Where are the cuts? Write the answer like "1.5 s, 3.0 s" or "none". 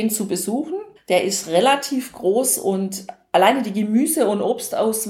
1.0 s